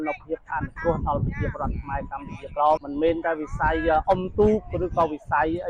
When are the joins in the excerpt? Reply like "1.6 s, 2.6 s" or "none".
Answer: 2.8 s